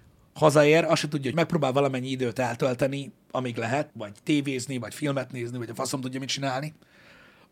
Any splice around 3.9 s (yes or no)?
yes